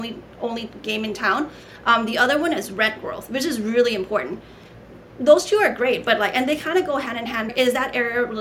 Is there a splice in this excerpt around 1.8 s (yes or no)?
no